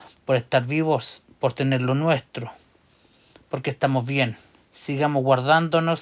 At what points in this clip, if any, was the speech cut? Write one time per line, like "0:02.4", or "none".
0:04.7